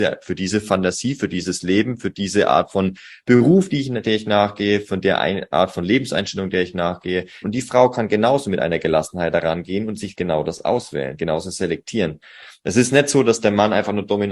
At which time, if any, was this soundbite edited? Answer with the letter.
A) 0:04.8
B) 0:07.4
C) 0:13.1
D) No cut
B